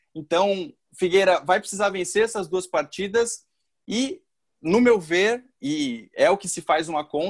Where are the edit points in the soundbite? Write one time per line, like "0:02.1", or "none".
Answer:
none